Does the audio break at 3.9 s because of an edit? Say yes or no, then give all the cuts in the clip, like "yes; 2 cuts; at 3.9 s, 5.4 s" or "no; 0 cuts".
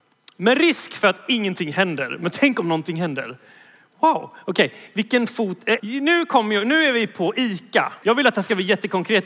no; 2 cuts; at 5.8 s, 8.0 s